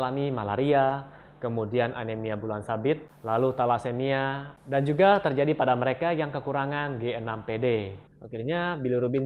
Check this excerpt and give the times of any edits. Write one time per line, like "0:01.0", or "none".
0:08.1